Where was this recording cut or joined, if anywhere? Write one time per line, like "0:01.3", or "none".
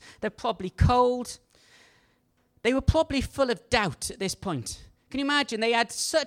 none